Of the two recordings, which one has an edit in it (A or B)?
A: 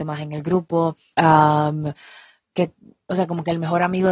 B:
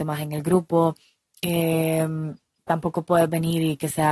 A